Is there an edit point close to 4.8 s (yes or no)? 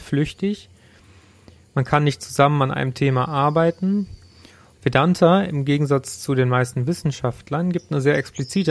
yes